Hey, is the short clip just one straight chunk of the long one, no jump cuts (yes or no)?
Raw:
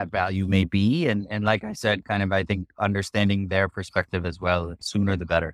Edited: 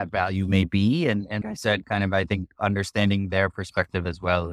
no